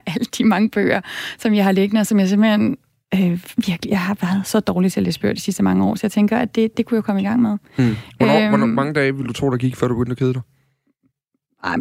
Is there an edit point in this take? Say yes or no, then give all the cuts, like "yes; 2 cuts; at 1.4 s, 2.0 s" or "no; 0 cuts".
no; 0 cuts